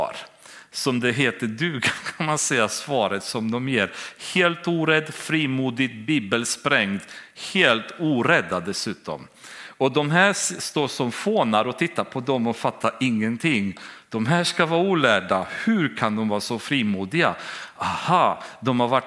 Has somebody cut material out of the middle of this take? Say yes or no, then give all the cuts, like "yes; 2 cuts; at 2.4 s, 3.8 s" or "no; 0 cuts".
no; 0 cuts